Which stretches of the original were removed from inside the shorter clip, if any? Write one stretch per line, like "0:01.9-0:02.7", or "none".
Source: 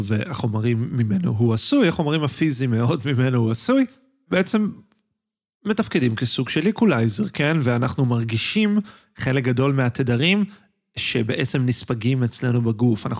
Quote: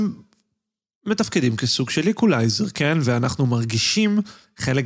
none